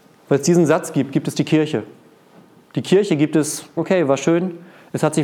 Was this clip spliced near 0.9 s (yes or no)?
no